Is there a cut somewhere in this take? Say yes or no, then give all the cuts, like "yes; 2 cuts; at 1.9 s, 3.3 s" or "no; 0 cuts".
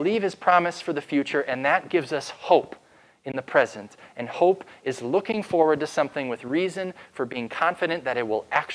no; 0 cuts